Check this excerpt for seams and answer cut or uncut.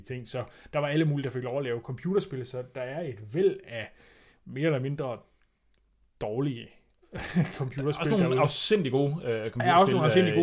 uncut